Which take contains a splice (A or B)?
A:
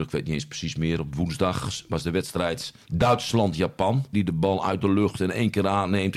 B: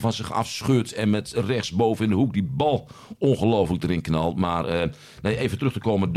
A